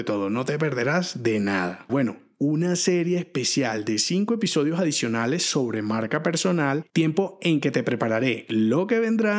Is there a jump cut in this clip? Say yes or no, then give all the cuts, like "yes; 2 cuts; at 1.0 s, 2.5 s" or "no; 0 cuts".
yes; 2 cuts; at 1.9 s, 6.9 s